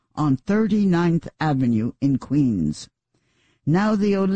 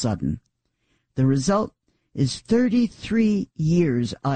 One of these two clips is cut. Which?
second; 1 cut; at 1.0 s

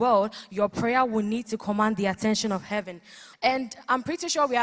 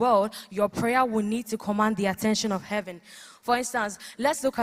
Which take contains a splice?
first; 1 cut; at 3.3 s

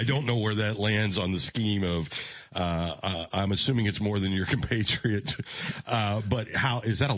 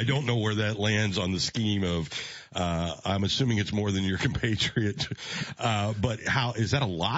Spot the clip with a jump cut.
second; 1 cut; at 3.0 s

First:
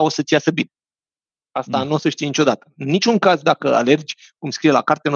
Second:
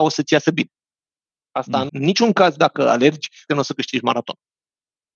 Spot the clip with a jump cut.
second; 2 cuts; at 1.9 s, 3.5 s

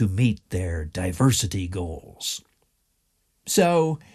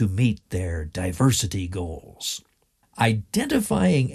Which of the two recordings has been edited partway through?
second; 1 cut; at 2.8 s

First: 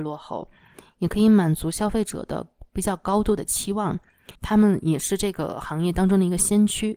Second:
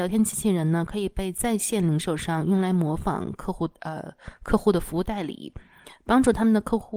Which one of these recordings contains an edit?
first; 1 cut; at 4.3 s

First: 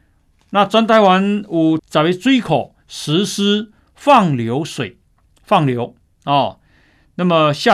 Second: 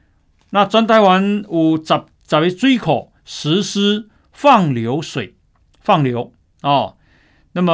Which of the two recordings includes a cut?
first; 1 cut; at 1.8 s

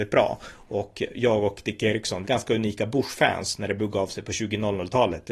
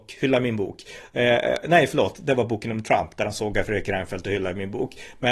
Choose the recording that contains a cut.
first; 1 cut; at 2.2 s

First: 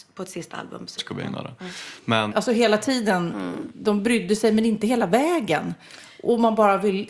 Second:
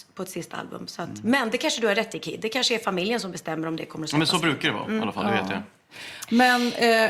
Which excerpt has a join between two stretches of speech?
first; 2 cuts; at 1.0 s, 2.3 s

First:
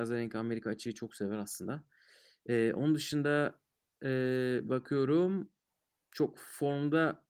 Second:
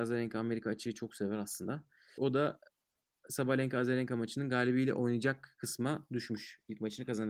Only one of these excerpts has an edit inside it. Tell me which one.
second; 1 cut; at 2.2 s

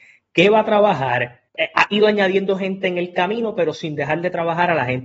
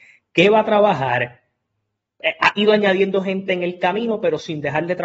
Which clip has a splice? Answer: first; 1 cut; at 1.5 s

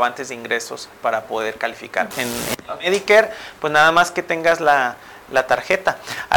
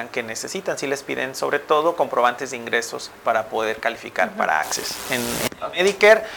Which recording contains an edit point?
first; 1 cut; at 2.1 s

